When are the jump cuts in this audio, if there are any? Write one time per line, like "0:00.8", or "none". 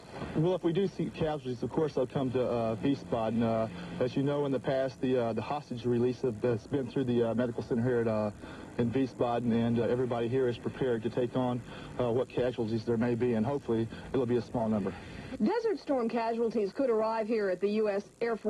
0:09.8